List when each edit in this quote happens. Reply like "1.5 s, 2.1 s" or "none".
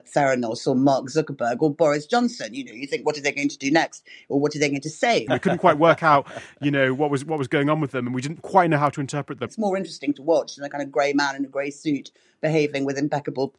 5.3 s, 9.5 s